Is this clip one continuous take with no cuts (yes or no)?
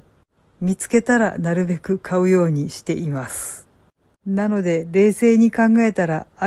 no